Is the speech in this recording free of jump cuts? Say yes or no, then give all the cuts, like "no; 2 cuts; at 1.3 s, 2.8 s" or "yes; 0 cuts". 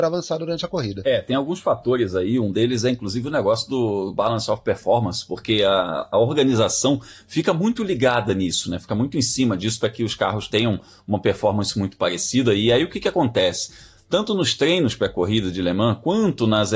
yes; 0 cuts